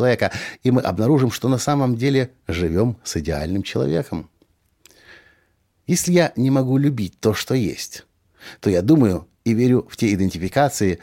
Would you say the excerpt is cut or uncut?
uncut